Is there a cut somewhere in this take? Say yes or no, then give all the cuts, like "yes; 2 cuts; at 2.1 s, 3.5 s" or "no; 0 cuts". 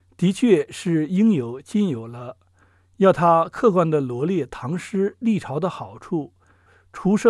no; 0 cuts